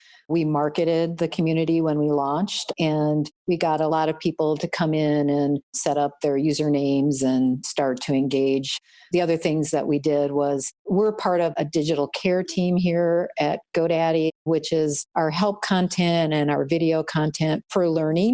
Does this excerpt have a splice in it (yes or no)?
no